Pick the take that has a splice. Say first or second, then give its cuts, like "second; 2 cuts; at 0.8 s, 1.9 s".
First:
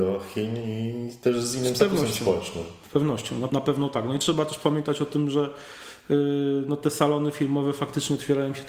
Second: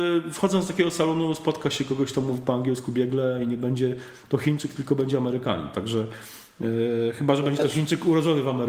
first; 1 cut; at 3.5 s